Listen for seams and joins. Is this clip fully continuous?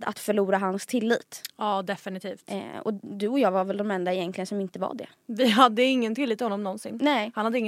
yes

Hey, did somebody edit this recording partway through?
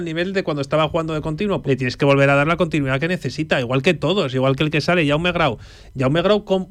yes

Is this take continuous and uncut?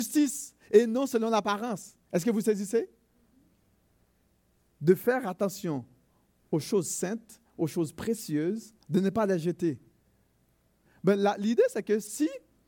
no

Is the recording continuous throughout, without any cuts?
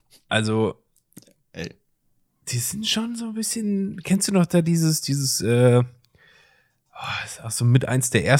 yes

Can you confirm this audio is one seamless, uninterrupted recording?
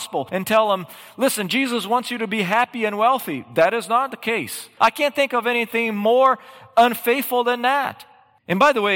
no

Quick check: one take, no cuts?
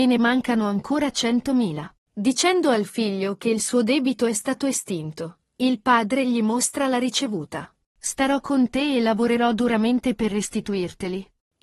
no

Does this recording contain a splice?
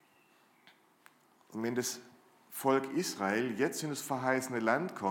no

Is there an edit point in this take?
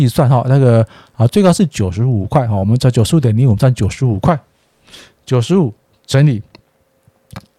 no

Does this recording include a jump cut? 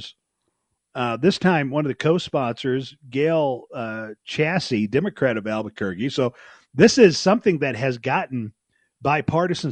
no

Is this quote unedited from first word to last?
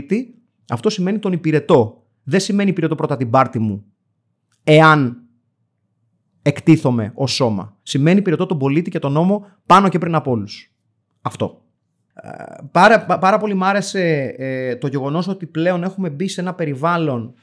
yes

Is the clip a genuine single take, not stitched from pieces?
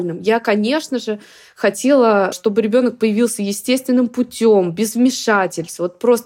yes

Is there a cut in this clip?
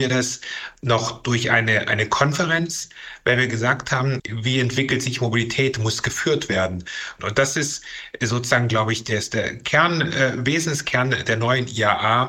yes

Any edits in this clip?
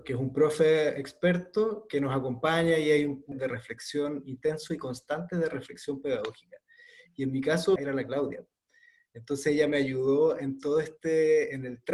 yes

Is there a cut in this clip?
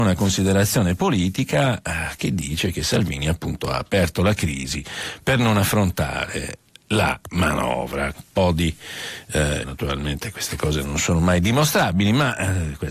yes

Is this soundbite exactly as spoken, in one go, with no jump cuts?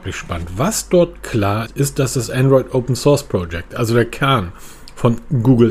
no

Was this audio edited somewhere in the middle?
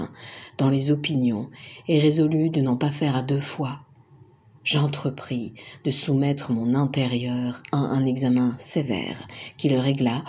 no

